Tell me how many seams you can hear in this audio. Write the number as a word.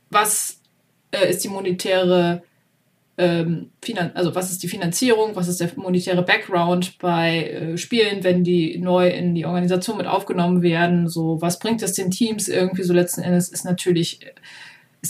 zero